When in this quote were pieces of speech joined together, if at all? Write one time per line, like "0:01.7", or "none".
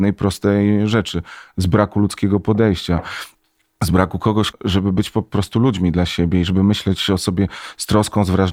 0:04.5